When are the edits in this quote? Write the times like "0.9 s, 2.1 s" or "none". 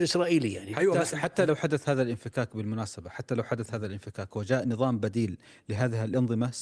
1.1 s